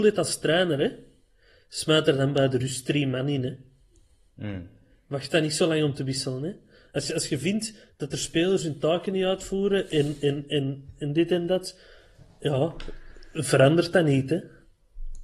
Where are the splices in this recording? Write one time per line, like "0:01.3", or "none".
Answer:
none